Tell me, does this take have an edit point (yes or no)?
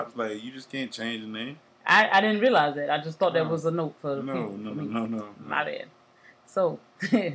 no